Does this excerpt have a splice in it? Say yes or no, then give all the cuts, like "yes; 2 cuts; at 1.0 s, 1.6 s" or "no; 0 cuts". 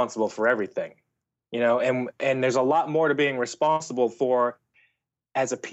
no; 0 cuts